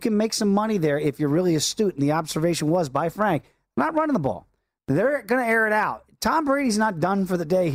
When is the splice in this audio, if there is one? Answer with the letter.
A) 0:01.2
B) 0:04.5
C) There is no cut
C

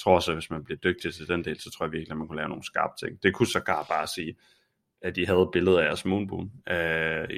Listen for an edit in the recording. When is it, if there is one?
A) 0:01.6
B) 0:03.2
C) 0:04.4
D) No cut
D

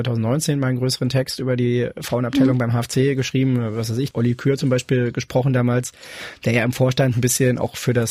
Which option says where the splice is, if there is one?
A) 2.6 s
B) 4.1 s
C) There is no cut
B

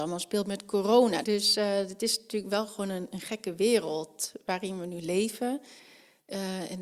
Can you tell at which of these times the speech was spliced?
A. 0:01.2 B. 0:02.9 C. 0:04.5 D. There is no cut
A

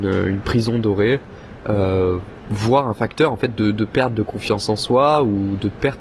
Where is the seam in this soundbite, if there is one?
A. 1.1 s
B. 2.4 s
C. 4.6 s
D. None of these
D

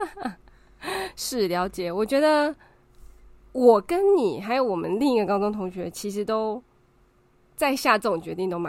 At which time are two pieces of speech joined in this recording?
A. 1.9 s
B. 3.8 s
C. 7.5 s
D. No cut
D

